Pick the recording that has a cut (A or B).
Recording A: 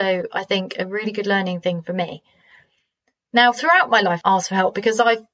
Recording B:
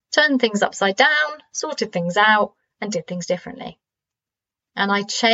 A